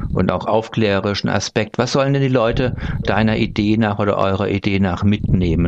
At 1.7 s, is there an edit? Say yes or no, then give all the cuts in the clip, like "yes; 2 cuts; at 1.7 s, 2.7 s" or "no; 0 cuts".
no; 1 cut; at 3.0 s